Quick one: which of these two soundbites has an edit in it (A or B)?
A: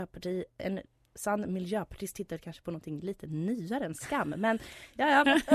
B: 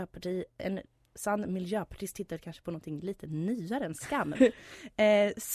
B